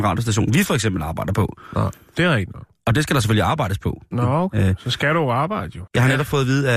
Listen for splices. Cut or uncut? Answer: cut